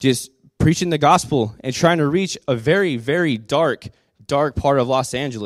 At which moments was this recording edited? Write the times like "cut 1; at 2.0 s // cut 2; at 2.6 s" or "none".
none